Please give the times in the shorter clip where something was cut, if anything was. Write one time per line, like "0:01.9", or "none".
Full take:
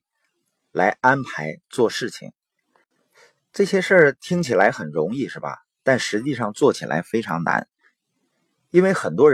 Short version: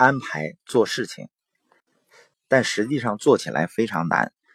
0:02.3